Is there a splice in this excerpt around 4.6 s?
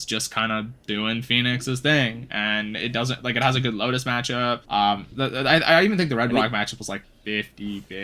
yes; 2 cuts; at 4.6 s, 7.0 s

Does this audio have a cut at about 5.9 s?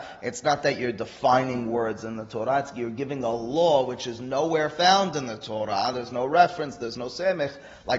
no; 0 cuts

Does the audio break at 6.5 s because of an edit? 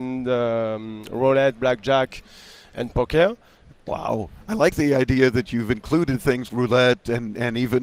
yes; 2 cuts; at 3.7 s, 6.5 s

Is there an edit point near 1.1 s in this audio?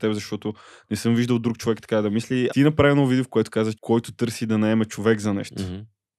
no; 2 cuts; at 2.5 s, 3.7 s

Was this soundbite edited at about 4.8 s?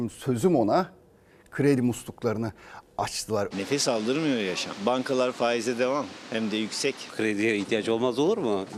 no; 2 cuts; at 3.5 s, 7.1 s

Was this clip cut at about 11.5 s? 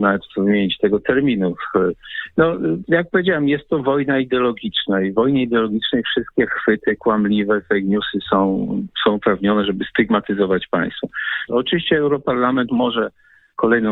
yes; 1 cut; at 11.5 s

